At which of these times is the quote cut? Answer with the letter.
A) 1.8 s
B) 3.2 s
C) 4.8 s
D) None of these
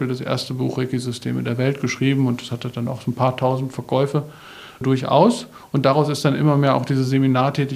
C